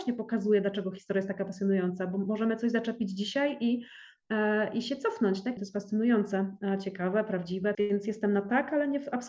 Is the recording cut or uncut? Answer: cut